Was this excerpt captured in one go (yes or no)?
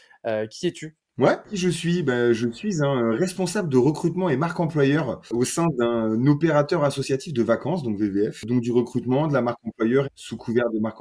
no